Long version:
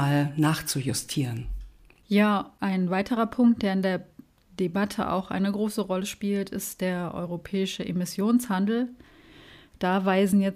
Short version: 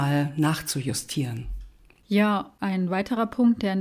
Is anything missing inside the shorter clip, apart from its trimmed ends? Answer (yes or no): no